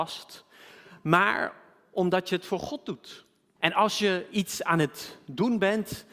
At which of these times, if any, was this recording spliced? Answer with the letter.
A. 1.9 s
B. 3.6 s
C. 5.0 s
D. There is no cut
B